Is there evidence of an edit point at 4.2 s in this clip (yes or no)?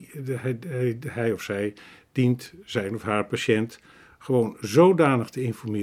no